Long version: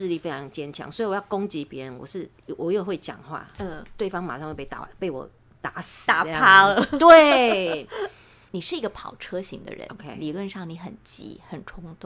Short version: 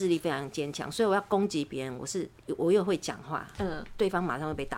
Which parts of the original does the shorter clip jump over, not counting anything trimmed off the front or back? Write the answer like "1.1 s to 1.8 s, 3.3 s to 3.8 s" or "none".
none

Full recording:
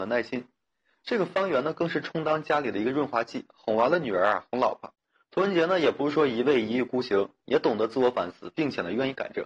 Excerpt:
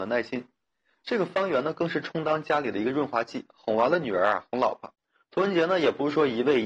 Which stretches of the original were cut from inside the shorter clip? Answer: none

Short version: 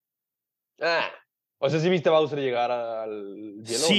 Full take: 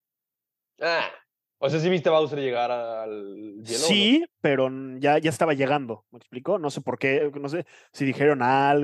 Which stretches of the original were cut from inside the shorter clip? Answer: none

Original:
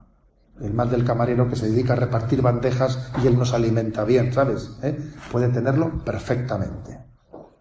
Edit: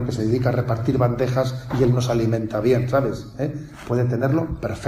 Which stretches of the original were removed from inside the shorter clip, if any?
none

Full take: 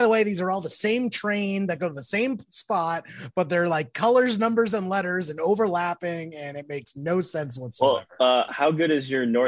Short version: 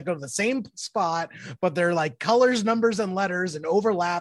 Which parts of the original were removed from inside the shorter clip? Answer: none

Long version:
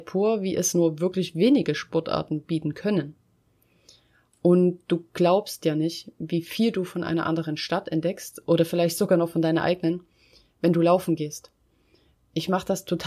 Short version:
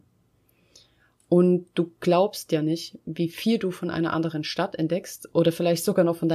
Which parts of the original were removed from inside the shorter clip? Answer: none

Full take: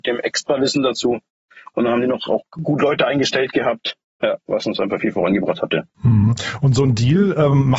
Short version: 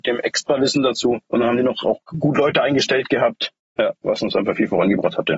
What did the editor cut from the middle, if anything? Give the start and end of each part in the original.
1.3 s to 1.7 s

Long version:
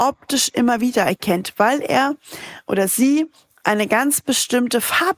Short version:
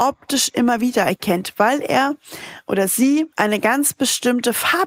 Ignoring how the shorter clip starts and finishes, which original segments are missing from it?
3.3 s to 3.6 s

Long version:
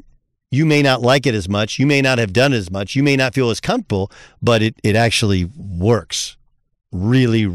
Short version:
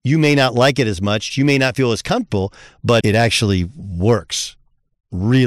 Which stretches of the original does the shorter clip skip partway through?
1.8 s to 2.9 s, 4.6 s to 4.8 s

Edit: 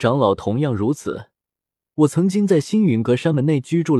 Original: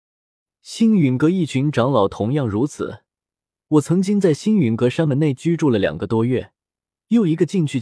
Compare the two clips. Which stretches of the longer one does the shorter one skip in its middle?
none

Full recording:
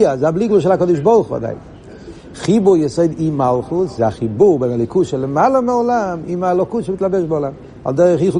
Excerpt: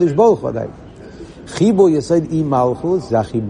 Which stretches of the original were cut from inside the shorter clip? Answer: none

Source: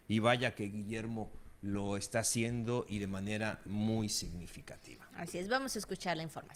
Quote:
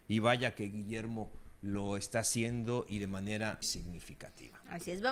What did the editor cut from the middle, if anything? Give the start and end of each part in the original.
3.6 s to 4.1 s

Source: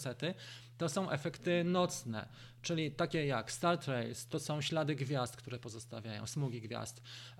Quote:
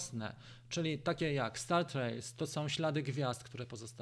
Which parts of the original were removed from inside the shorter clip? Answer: none

